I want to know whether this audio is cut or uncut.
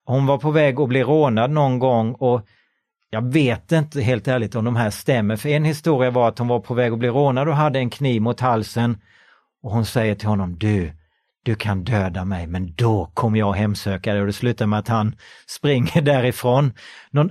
uncut